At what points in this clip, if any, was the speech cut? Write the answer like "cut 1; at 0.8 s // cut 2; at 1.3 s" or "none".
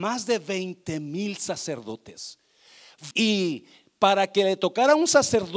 cut 1; at 3.1 s